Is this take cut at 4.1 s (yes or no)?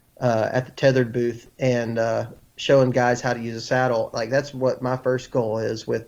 yes